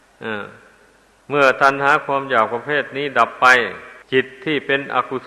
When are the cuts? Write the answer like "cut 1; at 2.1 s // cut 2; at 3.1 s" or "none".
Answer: cut 1; at 4.0 s